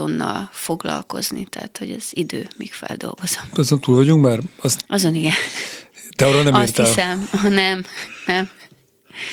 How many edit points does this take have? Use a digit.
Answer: 1